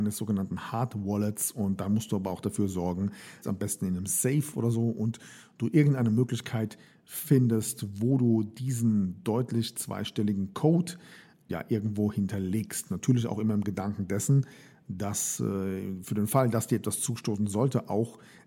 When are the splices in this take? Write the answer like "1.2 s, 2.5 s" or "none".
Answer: 3.4 s, 11.5 s